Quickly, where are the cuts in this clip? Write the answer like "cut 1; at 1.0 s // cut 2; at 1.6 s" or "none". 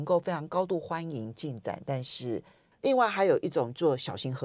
cut 1; at 2.7 s